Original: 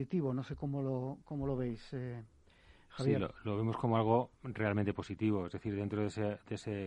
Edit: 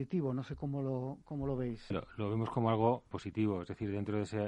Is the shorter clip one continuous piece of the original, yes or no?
no